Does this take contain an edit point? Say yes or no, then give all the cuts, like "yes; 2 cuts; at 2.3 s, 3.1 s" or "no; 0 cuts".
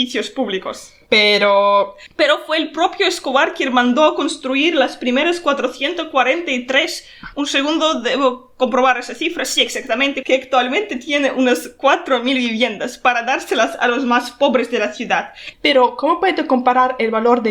yes; 2 cuts; at 10.2 s, 15.5 s